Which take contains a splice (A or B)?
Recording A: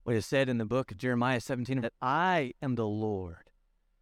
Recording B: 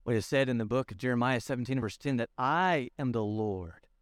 A